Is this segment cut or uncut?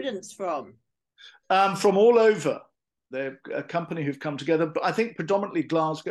cut